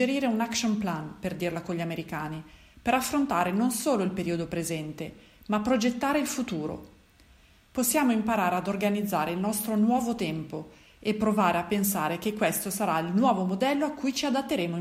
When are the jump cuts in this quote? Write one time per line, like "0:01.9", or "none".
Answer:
none